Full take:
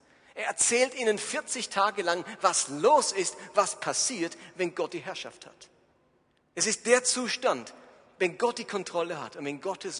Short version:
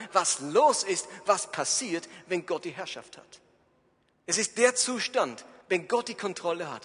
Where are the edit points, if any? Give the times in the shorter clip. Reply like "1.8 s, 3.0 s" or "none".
5.6 s